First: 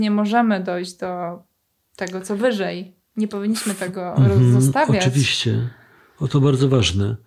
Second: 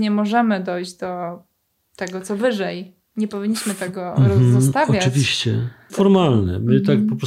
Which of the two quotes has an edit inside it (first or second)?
second